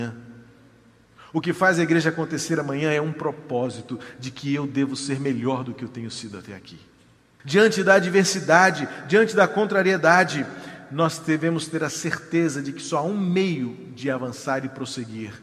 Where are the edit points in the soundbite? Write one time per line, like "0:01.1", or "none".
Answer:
0:07.4